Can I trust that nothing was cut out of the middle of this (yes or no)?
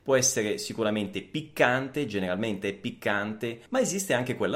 no